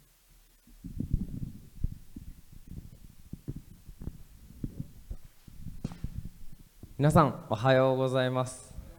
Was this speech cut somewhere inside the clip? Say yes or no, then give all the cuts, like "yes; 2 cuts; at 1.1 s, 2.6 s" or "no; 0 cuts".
no; 0 cuts